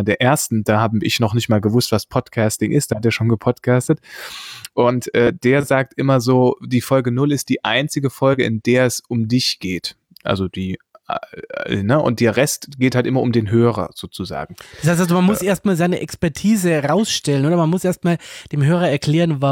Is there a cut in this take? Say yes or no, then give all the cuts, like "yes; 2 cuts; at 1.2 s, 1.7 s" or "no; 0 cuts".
no; 0 cuts